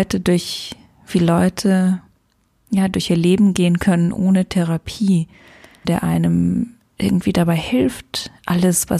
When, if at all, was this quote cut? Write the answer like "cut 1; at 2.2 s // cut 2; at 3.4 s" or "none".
cut 1; at 5.8 s